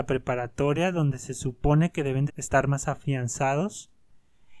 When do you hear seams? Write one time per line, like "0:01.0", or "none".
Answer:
0:02.3